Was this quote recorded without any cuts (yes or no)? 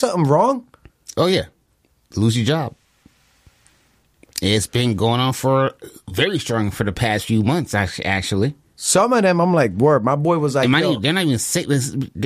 yes